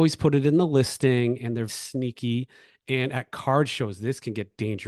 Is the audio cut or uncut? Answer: cut